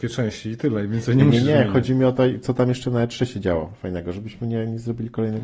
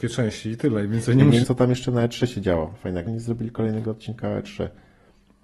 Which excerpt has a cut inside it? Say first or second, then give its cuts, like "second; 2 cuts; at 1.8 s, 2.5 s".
second; 2 cuts; at 1.4 s, 3.1 s